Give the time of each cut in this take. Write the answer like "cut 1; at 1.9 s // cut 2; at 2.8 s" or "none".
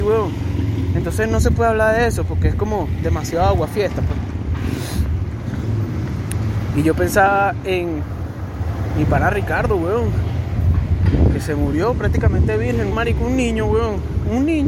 cut 1; at 12.9 s